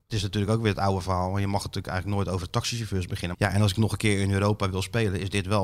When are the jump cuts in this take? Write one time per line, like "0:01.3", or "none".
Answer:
0:03.3